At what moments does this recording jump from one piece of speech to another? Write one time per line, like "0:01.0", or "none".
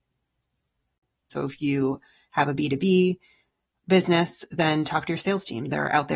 0:01.3

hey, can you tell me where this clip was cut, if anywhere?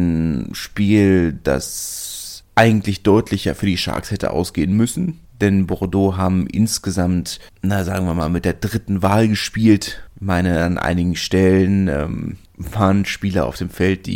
none

